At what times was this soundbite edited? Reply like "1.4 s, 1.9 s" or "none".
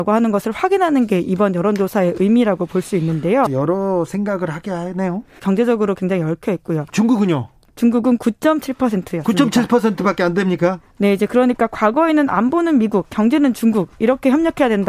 3.5 s, 5.4 s, 6.9 s